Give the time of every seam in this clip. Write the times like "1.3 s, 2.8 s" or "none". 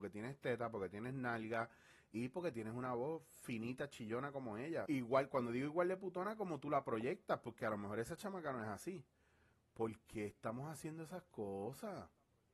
4.9 s